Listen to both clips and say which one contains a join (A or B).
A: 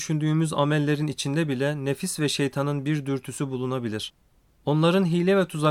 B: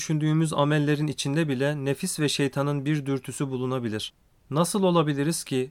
B